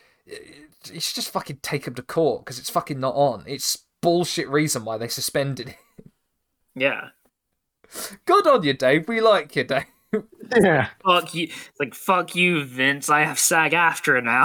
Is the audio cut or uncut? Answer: uncut